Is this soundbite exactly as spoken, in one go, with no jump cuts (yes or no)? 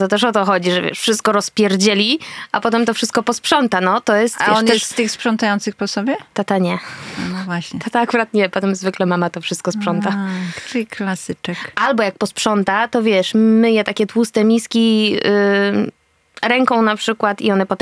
yes